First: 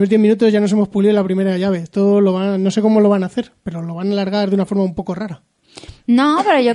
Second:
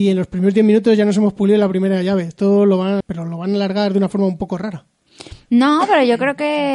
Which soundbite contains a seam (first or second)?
second